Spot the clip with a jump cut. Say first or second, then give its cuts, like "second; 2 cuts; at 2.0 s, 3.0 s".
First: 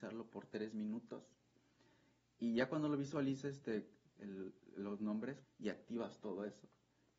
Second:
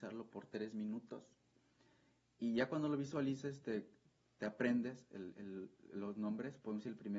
first; 2 cuts; at 4.2 s, 5.4 s